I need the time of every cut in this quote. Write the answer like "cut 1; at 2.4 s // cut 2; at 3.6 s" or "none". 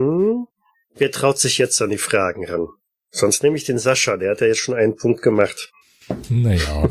none